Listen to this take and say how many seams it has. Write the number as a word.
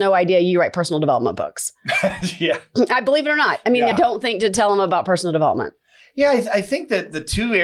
one